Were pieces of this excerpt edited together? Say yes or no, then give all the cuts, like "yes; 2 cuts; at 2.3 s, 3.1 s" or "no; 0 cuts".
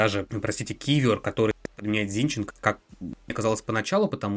yes; 1 cut; at 2.5 s